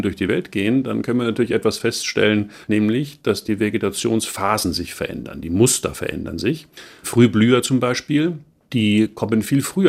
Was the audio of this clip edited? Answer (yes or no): yes